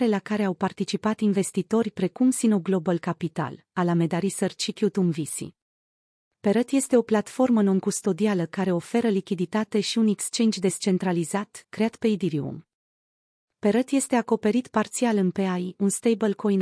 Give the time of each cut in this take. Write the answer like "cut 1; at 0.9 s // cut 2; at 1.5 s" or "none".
cut 1; at 11.6 s

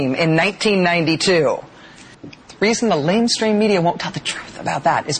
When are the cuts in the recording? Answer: cut 1; at 2.1 s

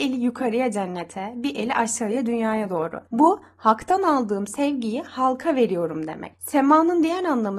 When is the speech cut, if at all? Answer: none

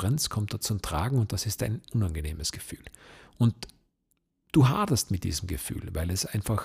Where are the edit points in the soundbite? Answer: cut 1; at 1.9 s

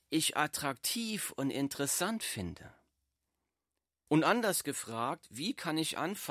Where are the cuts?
cut 1; at 4.1 s

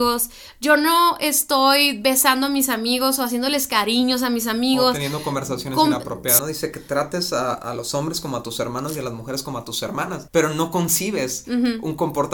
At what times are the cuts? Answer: cut 1; at 6.4 s // cut 2; at 7.5 s

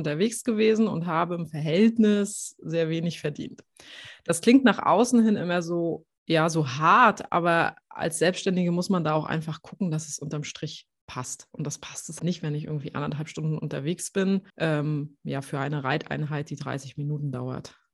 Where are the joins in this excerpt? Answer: cut 1; at 12.2 s // cut 2; at 14.5 s

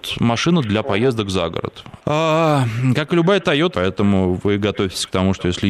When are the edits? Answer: cut 1; at 2.0 s // cut 2; at 3.7 s

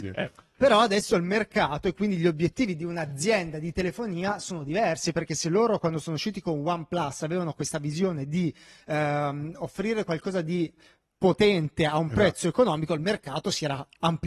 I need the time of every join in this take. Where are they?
none

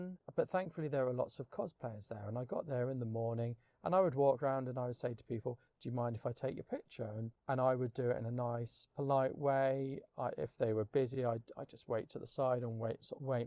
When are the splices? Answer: none

